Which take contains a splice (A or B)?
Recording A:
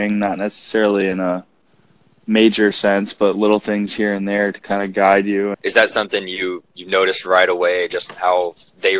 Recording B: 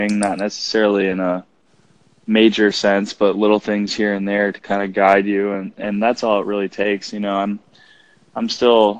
A